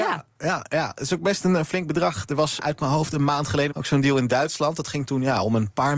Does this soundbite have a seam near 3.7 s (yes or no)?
yes